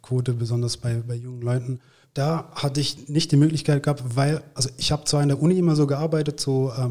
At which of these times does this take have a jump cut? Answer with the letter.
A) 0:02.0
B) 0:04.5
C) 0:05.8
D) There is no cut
A